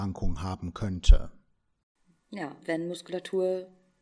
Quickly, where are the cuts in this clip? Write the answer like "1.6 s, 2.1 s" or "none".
2.6 s